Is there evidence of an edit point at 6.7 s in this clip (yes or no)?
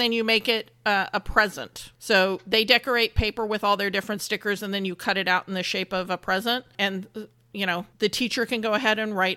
no